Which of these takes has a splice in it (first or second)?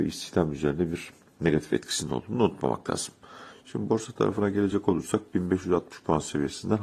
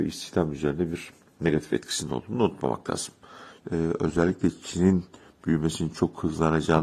second